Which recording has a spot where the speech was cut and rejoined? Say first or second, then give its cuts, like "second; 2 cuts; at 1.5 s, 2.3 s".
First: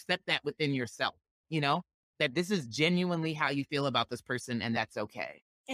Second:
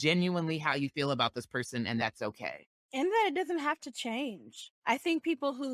second; 1 cut; at 4.8 s